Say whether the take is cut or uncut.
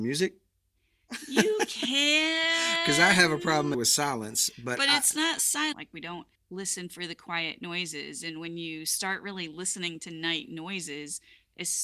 cut